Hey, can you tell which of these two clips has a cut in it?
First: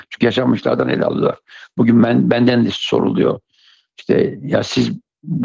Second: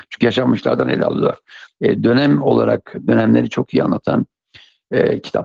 second; 1 cut; at 1.7 s

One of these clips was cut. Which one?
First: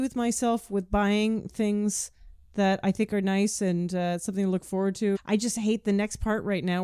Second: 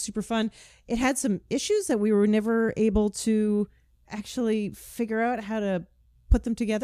first; 1 cut; at 5.1 s

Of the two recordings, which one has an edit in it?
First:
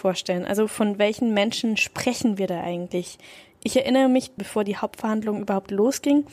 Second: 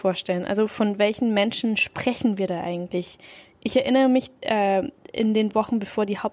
first; 1 cut; at 4.4 s

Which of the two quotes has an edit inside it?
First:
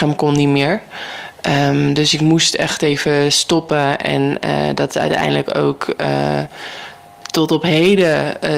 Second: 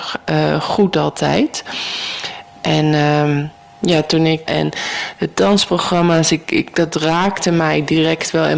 second; 1 cut; at 4.5 s

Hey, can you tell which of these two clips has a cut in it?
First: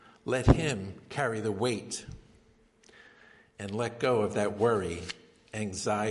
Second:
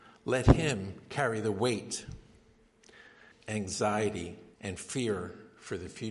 second; 2 cuts; at 3.3 s, 4.5 s

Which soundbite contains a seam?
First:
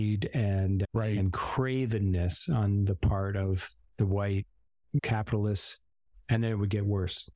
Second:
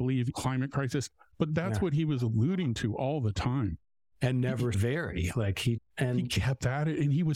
second; 2 cuts; at 4.1 s, 5.8 s

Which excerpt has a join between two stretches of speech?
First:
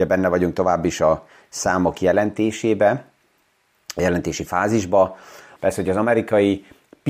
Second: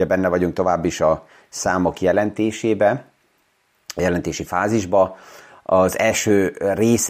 first; 1 cut; at 5.6 s

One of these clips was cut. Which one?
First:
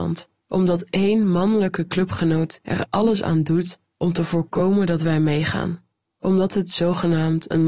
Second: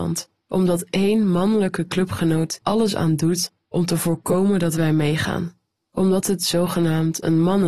second; 1 cut; at 2.6 s

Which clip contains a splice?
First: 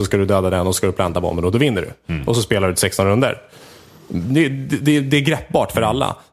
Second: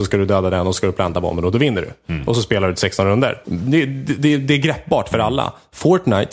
second; 1 cut; at 3.4 s

